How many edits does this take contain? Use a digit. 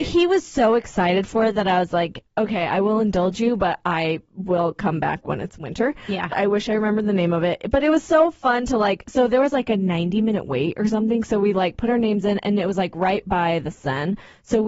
1